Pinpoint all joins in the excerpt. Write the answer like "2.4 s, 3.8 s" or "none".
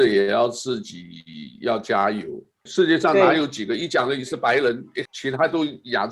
2.7 s, 5.1 s